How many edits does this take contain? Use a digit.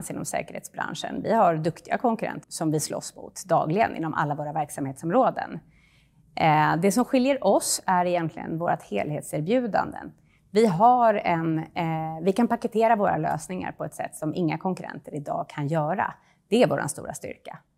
1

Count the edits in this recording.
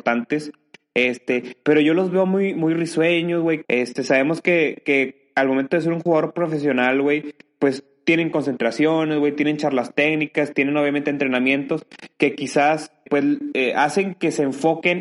2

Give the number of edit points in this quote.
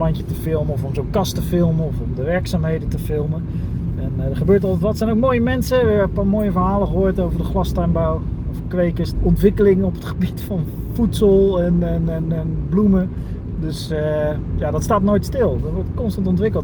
1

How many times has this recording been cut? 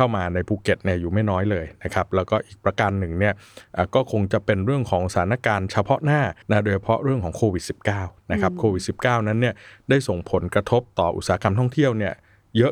1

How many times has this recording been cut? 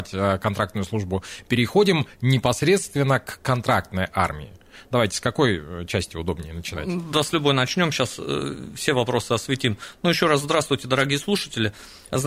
0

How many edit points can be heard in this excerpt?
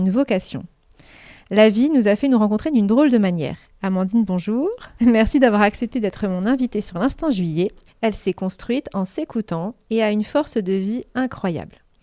3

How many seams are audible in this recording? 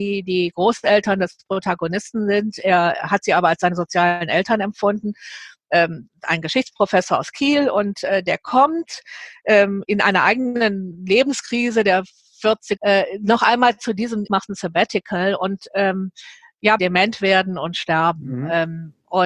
3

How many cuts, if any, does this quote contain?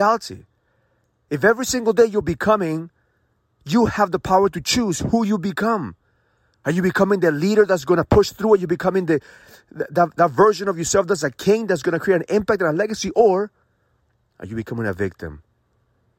0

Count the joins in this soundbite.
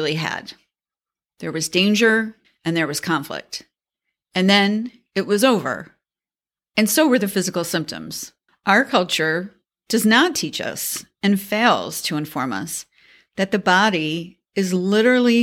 2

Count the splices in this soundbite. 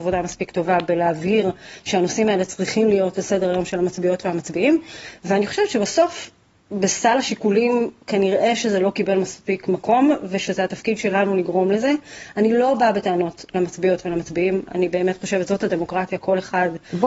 0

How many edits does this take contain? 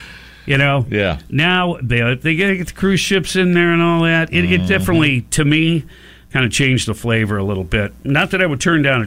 0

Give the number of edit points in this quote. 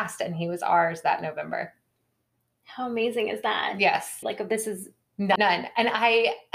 2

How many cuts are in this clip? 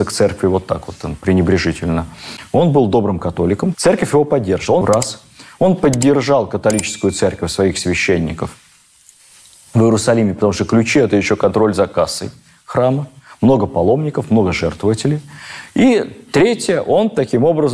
2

